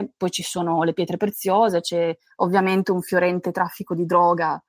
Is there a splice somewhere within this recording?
no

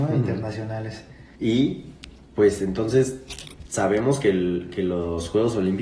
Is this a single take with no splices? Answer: no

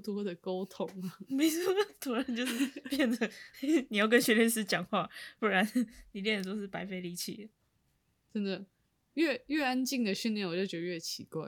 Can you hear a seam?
no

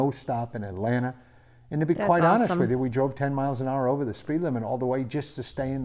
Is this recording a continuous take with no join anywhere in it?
yes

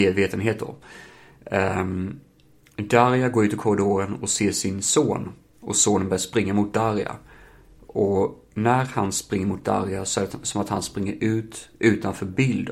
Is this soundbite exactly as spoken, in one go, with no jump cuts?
yes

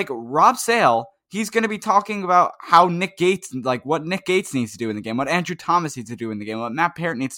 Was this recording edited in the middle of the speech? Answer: no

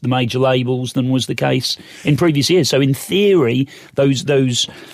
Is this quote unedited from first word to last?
yes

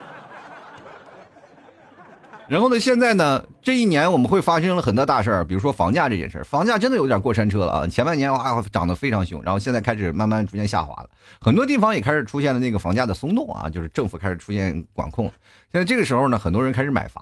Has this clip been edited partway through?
no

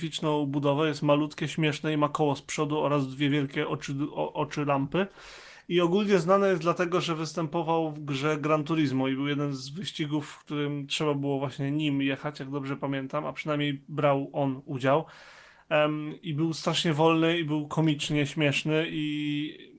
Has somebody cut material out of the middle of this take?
no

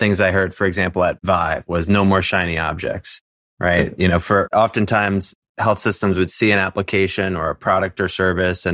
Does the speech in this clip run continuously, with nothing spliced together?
yes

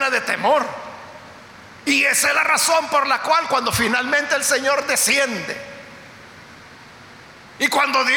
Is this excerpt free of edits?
yes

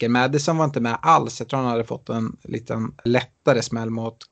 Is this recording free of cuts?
no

